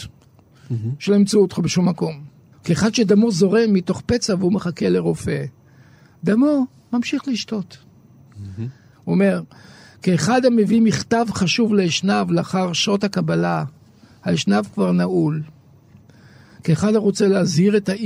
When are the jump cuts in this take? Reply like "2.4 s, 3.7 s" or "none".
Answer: 2.5 s, 8.9 s